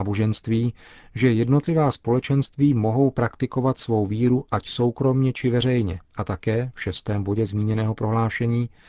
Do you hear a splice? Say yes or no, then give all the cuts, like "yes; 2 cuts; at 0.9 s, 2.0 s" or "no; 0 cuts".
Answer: yes; 1 cut; at 6.0 s